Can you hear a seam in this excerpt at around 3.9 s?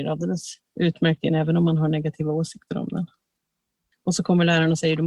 yes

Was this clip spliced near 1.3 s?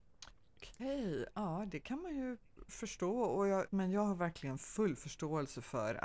no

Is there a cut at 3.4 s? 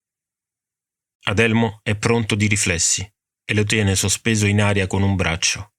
no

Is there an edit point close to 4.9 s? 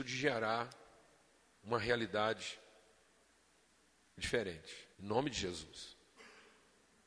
yes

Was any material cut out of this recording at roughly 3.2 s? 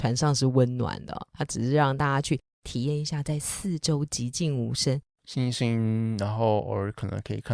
no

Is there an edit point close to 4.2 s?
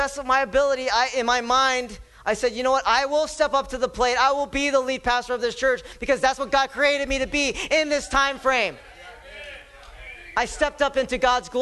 no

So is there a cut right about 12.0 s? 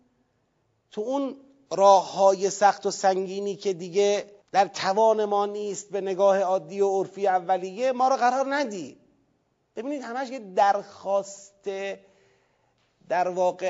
no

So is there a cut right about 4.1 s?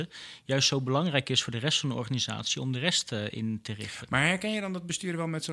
no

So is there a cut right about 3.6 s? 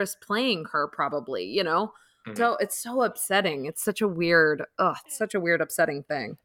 no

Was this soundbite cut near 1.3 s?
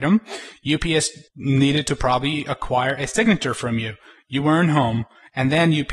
yes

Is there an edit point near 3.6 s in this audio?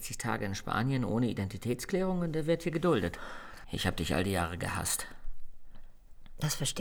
yes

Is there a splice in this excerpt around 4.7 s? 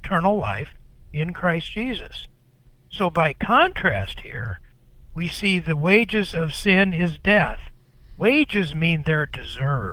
no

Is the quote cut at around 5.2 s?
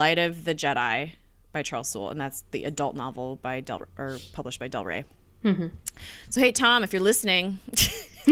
no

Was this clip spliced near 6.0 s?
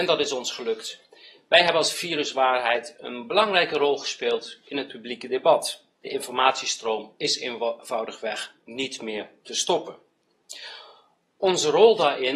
yes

